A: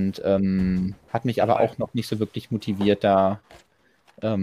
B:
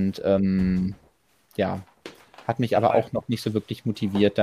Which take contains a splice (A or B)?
A